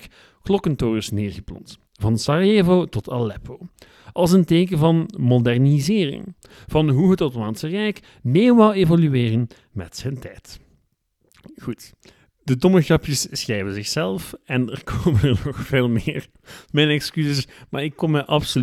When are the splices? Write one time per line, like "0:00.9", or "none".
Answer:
none

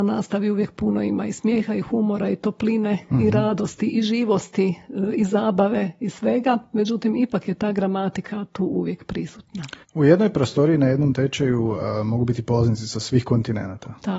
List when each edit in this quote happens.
0:09.8

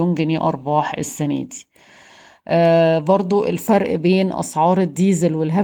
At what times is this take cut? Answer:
none

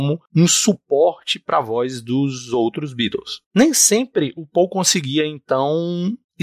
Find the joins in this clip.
0:03.5

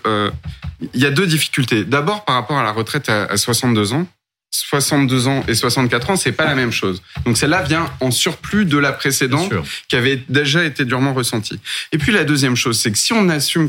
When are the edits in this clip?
none

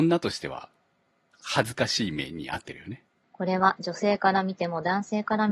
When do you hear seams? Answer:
0:03.2

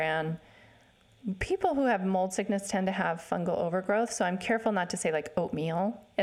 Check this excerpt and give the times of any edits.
none

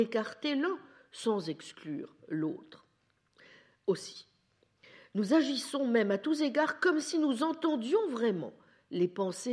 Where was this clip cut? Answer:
none

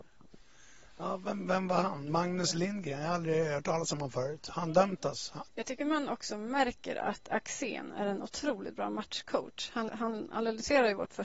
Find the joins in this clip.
0:05.5
0:09.9

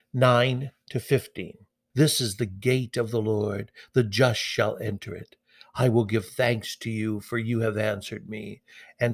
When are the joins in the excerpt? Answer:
0:01.9

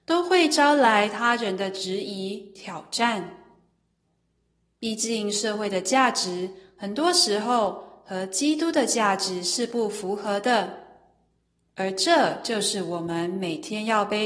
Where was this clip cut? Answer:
none

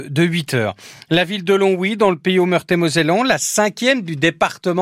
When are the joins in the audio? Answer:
none

